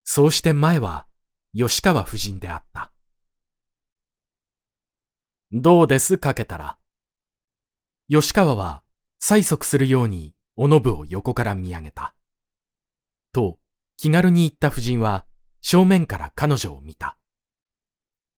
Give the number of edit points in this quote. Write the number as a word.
one